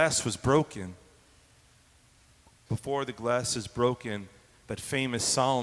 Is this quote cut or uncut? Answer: cut